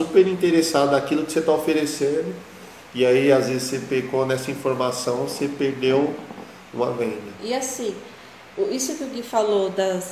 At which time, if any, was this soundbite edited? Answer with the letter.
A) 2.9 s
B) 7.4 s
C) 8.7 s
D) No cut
B